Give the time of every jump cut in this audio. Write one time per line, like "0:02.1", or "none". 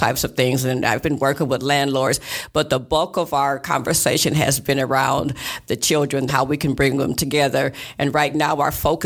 0:06.3